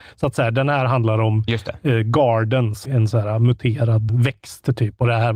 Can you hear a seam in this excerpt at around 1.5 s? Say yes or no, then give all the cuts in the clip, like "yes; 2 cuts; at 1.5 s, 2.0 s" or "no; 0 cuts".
no; 2 cuts; at 2.8 s, 4.1 s